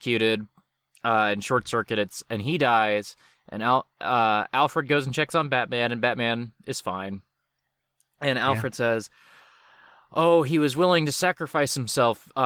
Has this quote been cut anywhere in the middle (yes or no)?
no